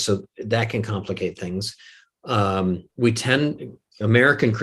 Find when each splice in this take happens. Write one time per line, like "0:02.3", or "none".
0:02.9